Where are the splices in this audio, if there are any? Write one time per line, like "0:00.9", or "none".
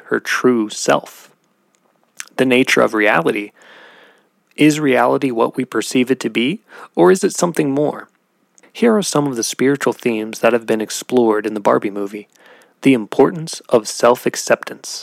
0:04.4
0:08.6